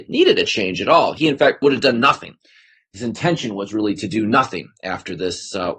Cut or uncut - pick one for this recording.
cut